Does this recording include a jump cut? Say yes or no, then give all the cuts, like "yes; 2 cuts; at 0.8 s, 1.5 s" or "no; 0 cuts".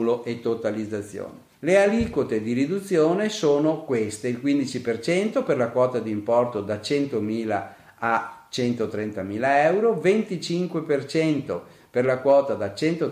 yes; 1 cut; at 1.5 s